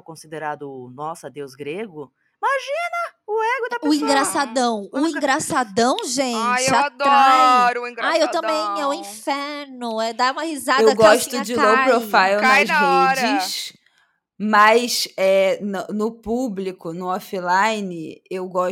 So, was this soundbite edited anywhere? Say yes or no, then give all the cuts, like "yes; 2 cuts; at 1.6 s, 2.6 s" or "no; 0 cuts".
no; 0 cuts